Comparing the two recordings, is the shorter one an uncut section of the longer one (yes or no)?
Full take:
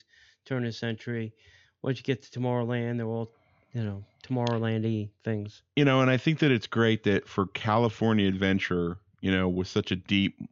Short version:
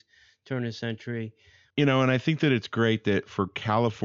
no